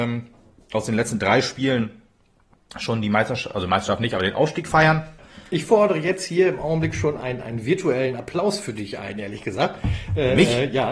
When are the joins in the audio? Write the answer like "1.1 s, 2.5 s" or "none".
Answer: 5.2 s